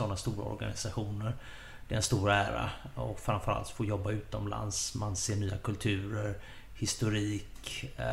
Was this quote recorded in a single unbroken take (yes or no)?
yes